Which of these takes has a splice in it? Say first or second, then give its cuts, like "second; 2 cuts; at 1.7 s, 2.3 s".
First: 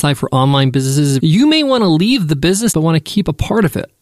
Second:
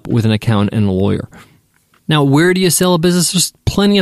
first; 2 cuts; at 1.2 s, 2.7 s